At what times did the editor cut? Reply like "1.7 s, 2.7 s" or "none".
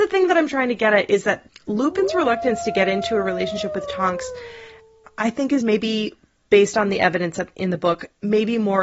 none

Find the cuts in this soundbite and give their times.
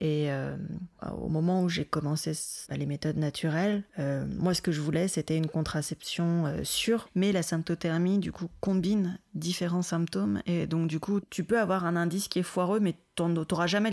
3.9 s

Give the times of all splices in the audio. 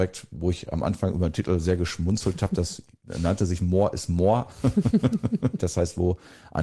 5.6 s

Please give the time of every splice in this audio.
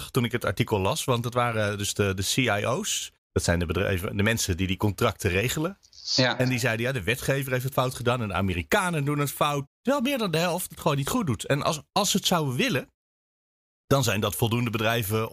9.7 s

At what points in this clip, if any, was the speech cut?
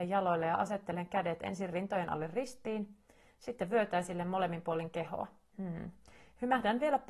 5.5 s

